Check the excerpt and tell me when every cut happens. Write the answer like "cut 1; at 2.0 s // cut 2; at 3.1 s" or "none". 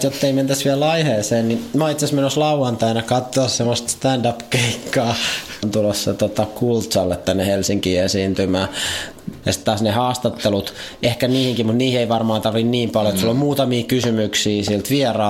cut 1; at 5.6 s // cut 2; at 9.4 s